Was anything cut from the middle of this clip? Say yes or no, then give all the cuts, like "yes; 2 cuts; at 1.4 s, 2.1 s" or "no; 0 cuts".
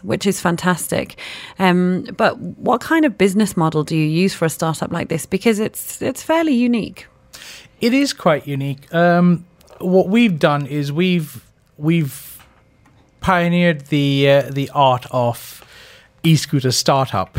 yes; 1 cut; at 2.2 s